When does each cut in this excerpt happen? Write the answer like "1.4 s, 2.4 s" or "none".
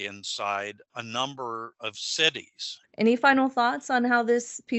2.8 s